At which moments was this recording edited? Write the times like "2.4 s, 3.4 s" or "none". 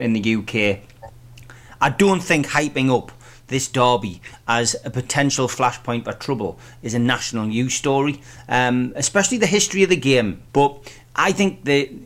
10.5 s